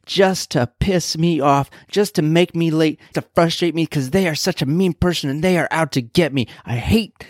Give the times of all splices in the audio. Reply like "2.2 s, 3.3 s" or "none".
3.1 s